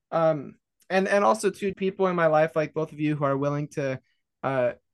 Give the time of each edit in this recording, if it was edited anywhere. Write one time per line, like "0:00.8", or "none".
0:01.7